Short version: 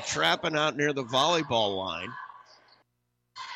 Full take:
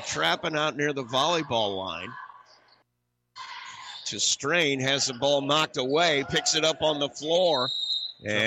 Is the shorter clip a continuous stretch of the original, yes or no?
yes